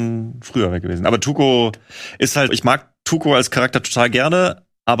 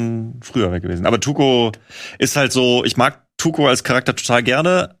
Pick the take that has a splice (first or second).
first